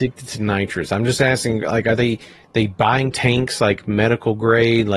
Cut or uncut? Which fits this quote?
uncut